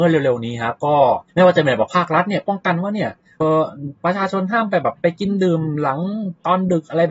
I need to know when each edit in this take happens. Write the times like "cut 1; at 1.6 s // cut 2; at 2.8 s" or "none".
cut 1; at 3.4 s